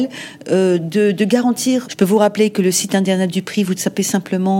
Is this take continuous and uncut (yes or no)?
no